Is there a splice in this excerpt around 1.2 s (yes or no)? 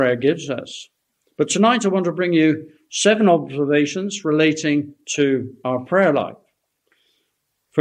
no